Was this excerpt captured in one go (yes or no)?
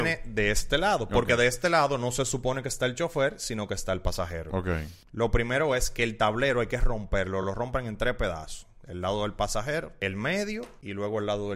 yes